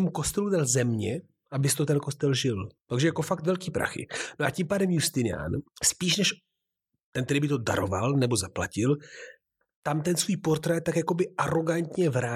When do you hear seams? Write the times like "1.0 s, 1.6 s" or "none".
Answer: 2.8 s